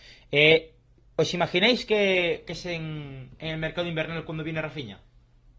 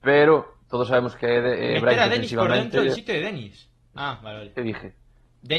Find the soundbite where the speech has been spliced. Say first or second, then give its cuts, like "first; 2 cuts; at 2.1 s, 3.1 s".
second; 1 cut; at 4.0 s